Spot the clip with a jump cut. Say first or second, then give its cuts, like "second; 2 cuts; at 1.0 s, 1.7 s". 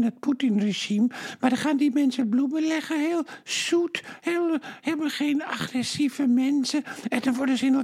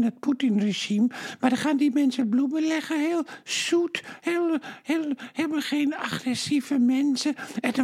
first; 1 cut; at 4.8 s